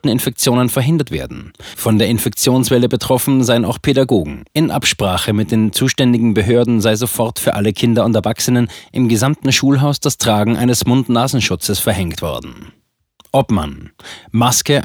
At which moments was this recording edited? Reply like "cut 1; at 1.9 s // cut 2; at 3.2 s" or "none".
cut 1; at 4.5 s